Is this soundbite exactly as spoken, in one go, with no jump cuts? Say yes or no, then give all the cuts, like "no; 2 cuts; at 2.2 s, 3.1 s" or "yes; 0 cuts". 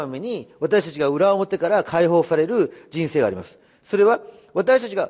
yes; 0 cuts